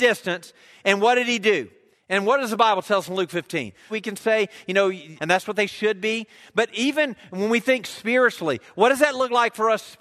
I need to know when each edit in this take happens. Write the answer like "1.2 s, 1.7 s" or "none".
1.9 s, 3.9 s, 5.2 s